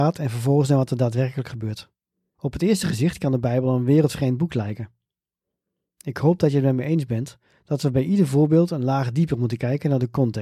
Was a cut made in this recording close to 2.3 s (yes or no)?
yes